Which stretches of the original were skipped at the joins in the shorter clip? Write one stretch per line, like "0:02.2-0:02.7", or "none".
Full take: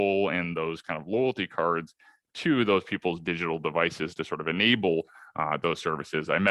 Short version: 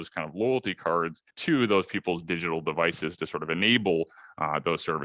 0:02.0-0:02.3